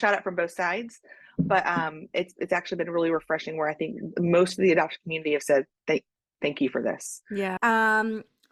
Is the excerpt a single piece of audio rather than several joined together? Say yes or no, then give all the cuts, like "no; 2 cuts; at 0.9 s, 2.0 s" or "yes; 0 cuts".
no; 1 cut; at 7.6 s